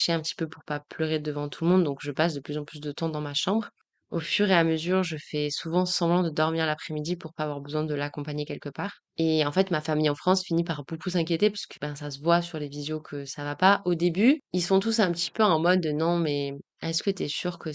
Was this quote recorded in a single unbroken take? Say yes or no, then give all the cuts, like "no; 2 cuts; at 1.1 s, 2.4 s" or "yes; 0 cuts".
yes; 0 cuts